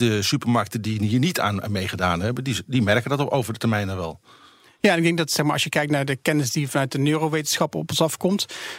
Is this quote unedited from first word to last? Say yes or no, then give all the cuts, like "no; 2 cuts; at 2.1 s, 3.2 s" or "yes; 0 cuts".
yes; 0 cuts